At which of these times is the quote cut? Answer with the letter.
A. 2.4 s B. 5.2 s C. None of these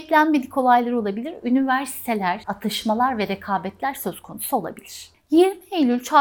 A